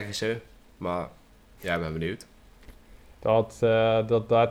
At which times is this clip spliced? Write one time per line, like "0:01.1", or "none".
0:03.1